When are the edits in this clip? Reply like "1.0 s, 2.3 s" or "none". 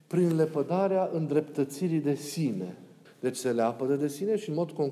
3.1 s

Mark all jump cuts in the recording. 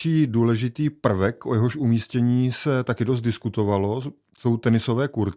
none

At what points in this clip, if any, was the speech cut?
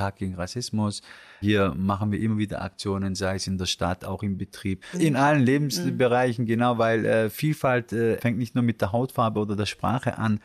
4.9 s

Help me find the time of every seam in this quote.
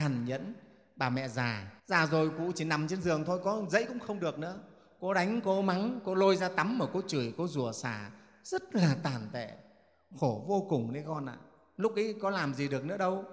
1.8 s

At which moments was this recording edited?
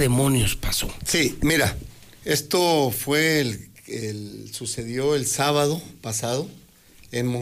none

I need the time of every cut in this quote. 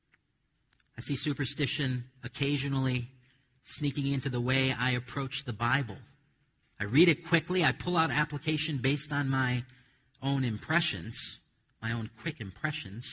6.6 s

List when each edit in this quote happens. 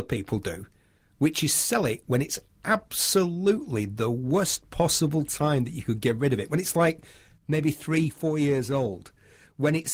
none

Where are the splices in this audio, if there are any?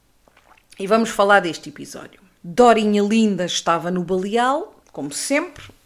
2.4 s, 4.8 s

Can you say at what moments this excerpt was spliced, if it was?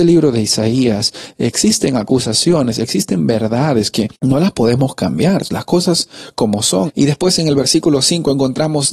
4.1 s, 6.9 s

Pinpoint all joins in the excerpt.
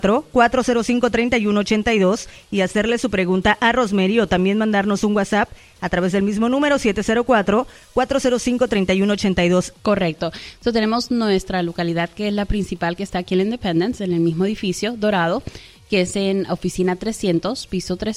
9.7 s

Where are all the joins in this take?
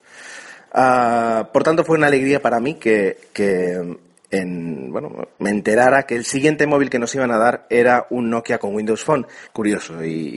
9.5 s

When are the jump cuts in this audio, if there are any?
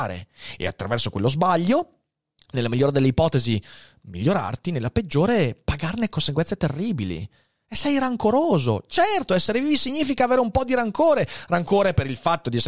none

